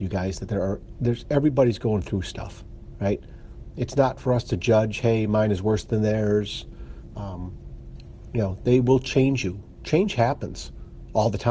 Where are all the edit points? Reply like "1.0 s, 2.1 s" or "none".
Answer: 7.1 s